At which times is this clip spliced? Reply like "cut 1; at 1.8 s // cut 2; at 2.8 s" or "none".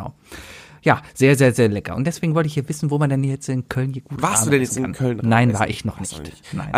none

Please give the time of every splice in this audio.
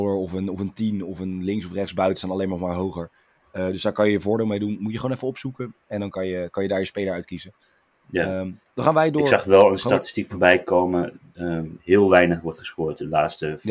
cut 1; at 11.8 s

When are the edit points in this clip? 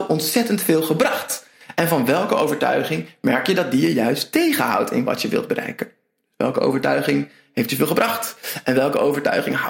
none

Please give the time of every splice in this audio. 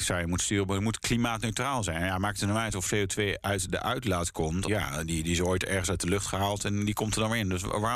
cut 1; at 2.9 s // cut 2; at 4.7 s

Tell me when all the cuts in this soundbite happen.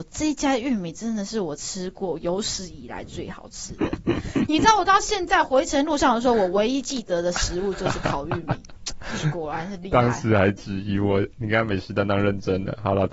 none

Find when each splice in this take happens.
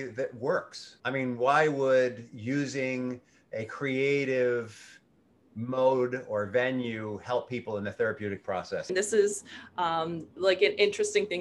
cut 1; at 1.0 s // cut 2; at 8.9 s

